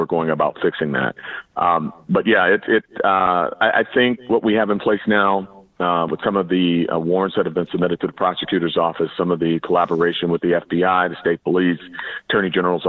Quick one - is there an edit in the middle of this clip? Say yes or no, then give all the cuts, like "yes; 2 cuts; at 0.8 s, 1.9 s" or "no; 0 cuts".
no; 0 cuts